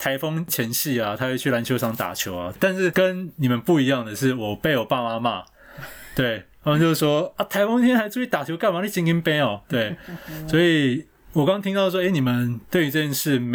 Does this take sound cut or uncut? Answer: cut